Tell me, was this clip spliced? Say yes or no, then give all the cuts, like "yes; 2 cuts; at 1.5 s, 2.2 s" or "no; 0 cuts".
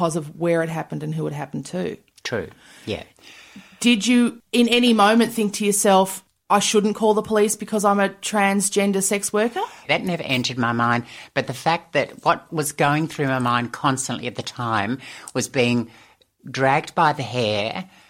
no; 0 cuts